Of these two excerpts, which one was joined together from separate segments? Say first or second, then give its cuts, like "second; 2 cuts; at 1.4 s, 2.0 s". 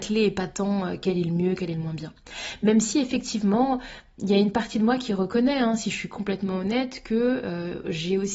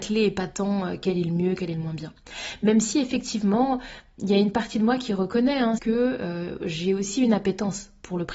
second; 1 cut; at 5.8 s